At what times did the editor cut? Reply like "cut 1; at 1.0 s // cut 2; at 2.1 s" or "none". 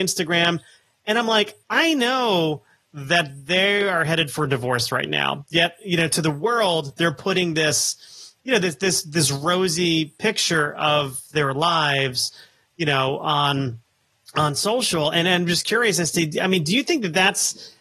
none